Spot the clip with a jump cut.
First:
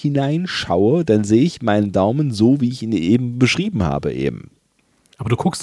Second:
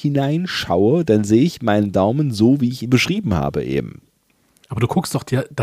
second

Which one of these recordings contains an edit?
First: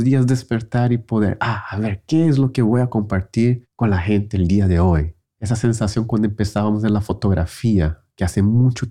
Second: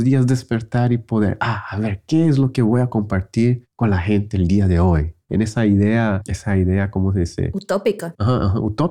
second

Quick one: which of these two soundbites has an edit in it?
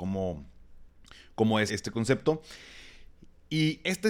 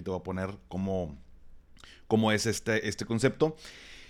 first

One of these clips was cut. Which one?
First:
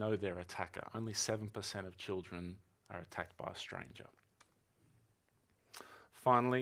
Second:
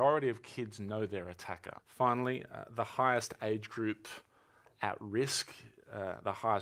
second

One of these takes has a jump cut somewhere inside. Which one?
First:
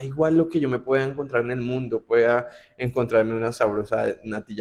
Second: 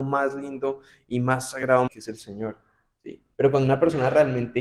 second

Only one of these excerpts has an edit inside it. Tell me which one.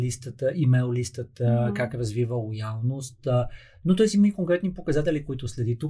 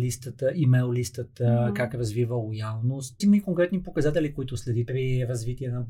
second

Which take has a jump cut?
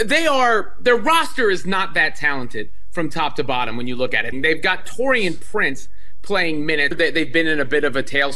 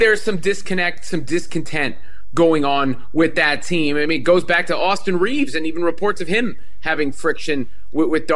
first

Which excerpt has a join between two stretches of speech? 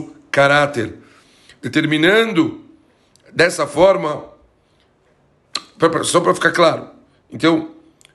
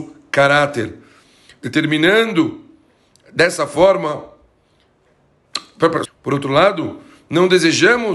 second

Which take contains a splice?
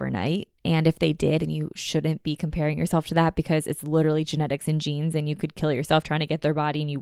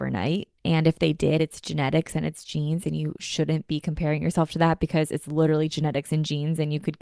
first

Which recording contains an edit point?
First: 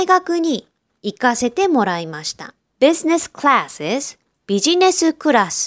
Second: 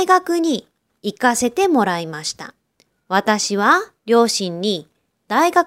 first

